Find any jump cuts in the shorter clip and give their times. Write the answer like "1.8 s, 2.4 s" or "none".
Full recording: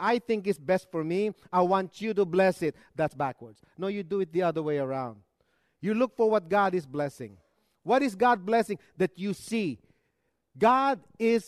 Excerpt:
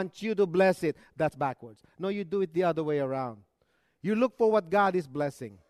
none